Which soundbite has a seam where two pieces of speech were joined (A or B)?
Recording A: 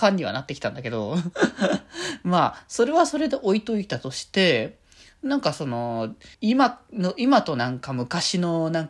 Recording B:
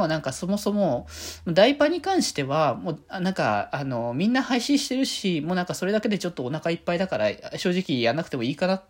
A